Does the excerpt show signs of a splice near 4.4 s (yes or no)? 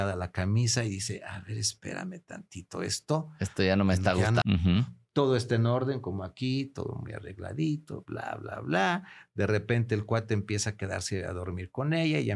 yes